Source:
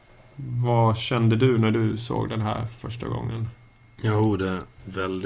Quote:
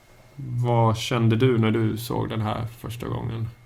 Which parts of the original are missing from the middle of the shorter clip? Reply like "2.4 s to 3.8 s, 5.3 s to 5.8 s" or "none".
none